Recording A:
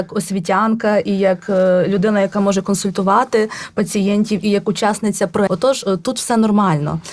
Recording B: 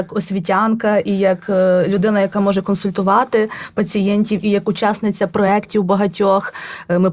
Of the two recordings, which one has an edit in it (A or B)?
A